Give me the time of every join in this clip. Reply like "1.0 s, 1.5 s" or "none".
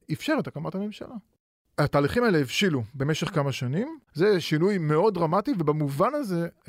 4.1 s